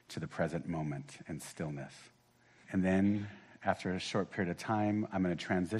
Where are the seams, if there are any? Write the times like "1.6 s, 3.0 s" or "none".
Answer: 2.6 s